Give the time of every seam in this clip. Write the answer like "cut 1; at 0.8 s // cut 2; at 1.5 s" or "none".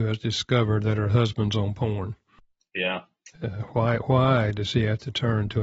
cut 1; at 3.3 s